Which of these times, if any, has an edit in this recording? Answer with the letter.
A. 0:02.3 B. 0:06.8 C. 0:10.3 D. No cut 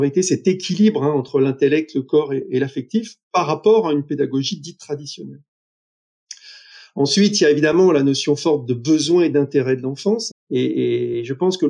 C